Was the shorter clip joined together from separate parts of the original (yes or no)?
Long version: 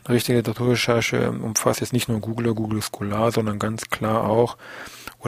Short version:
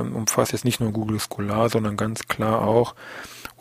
yes